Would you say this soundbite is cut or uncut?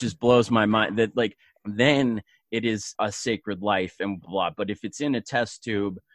cut